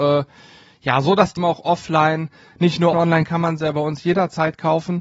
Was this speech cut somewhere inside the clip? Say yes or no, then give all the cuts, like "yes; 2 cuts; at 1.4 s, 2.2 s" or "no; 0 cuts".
yes; 2 cuts; at 1.4 s, 2.9 s